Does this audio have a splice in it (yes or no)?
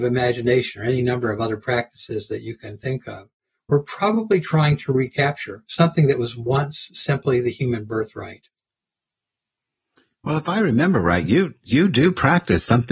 no